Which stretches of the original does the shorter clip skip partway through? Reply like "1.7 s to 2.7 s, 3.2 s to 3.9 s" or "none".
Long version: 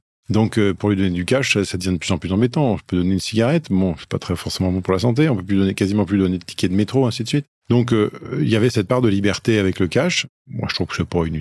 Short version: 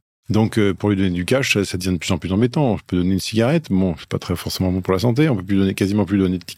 none